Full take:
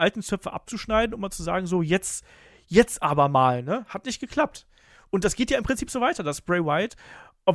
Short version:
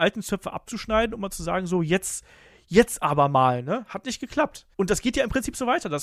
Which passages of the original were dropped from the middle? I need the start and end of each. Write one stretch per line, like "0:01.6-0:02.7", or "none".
0:04.7-0:05.1